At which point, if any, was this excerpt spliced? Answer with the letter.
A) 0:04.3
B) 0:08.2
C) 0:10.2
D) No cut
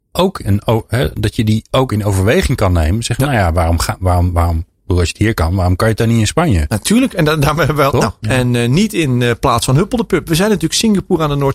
B